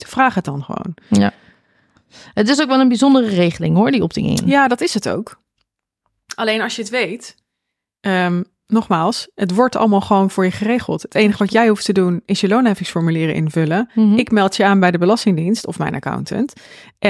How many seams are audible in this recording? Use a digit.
0